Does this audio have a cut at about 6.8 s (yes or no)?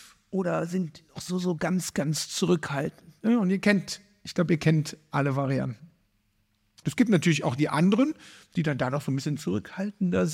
yes